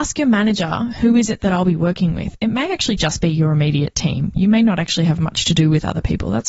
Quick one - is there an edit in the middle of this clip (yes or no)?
no